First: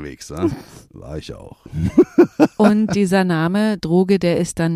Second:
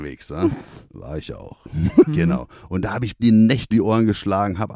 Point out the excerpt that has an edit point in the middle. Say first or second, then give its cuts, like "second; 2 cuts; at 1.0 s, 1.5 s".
second; 2 cuts; at 2.1 s, 3.7 s